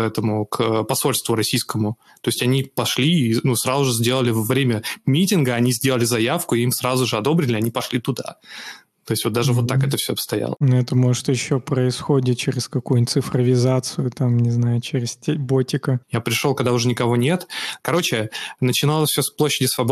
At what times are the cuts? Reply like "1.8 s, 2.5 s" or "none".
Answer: 16.0 s